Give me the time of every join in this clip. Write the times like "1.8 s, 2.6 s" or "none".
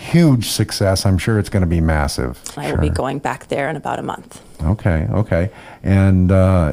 2.5 s